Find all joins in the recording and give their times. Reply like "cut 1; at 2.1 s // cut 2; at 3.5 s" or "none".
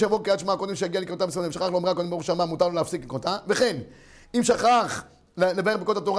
none